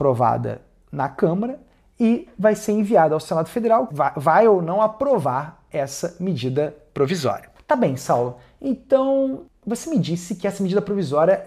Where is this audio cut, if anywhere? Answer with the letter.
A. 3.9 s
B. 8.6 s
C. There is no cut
A